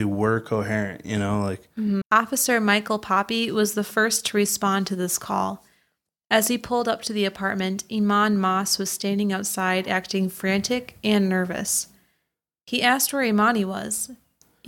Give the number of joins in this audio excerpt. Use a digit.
1